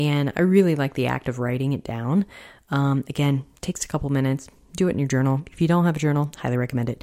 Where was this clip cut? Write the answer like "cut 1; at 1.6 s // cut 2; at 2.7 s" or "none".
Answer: none